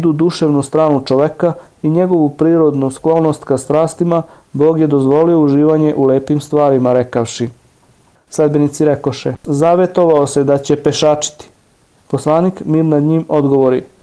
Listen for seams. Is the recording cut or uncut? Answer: cut